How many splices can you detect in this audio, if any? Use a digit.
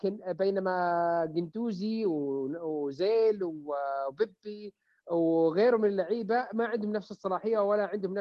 0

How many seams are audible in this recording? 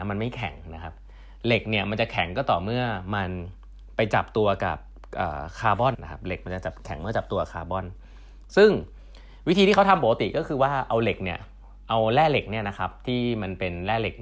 1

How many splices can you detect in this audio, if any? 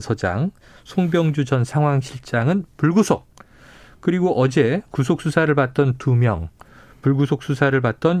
0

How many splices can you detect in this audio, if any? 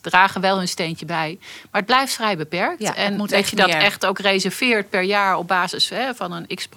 0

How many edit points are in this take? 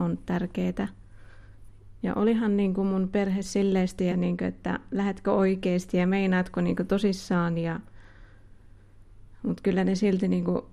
2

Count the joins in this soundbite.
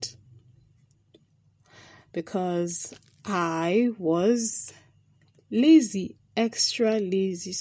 1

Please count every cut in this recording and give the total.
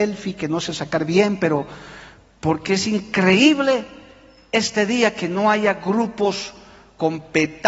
0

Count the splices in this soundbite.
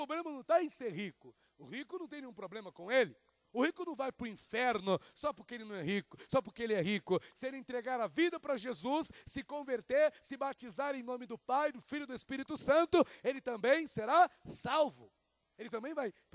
0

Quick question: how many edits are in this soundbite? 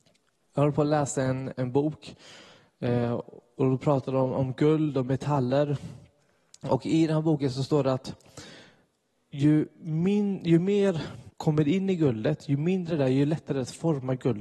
2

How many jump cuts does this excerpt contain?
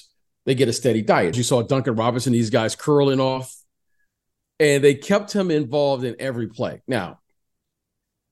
1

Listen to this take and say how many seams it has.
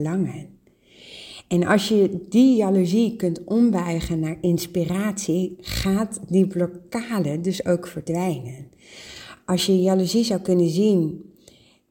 0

